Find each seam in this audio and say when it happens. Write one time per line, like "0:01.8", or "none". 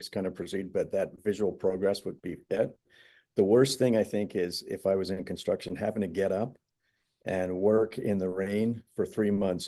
none